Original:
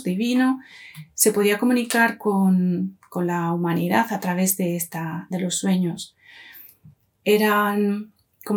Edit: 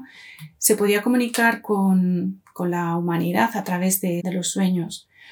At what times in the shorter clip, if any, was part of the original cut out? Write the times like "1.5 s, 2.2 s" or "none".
4.2 s

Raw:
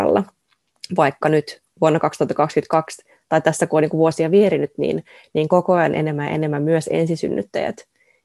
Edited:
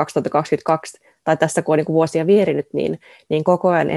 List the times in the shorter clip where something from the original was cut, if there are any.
none

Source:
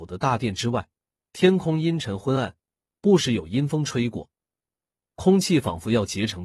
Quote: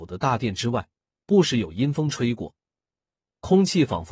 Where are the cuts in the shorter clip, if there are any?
1.2 s

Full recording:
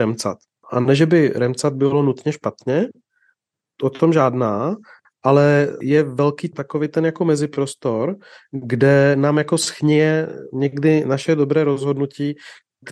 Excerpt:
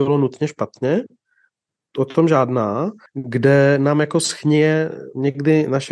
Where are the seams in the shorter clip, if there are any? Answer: 3.1 s

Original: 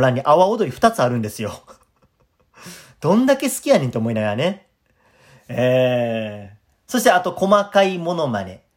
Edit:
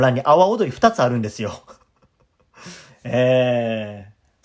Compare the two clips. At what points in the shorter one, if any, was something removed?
2.9 s

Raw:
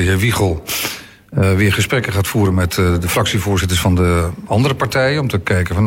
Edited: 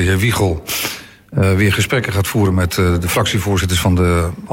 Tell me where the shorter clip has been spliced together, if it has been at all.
none

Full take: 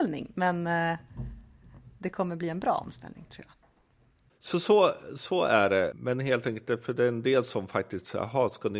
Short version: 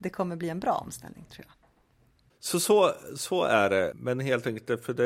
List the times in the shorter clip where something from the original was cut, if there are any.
none

